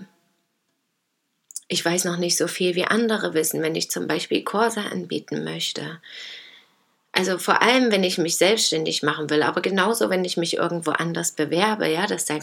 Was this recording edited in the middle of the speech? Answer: no; 0 cuts

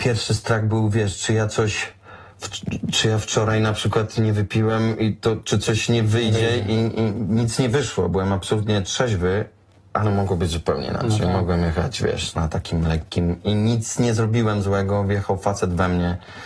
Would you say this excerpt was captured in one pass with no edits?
yes; 0 cuts

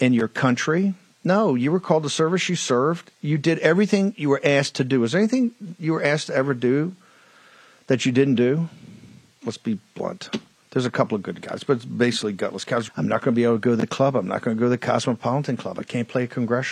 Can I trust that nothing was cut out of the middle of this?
no; 2 cuts; at 9.4 s, 12.9 s

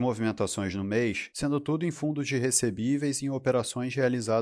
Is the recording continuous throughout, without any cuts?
no; 1 cut; at 1.3 s

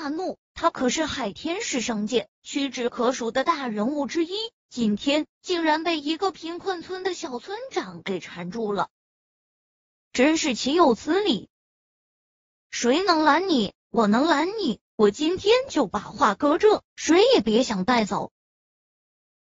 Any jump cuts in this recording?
yes; 1 cut; at 16.9 s

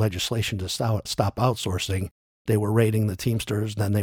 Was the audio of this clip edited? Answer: no; 0 cuts

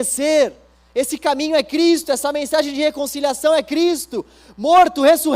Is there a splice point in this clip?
no; 0 cuts

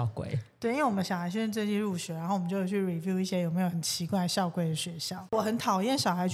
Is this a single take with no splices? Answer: yes; 0 cuts

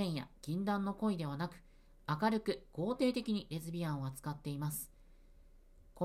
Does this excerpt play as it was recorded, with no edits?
yes; 0 cuts

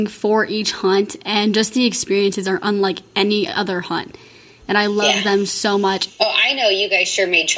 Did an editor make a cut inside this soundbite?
yes; 1 cut; at 6.1 s

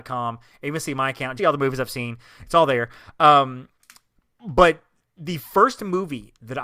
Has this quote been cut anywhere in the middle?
yes; 1 cut; at 1.4 s

